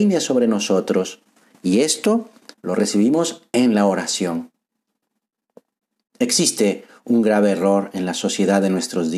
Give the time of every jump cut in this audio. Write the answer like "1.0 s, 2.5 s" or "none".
2.5 s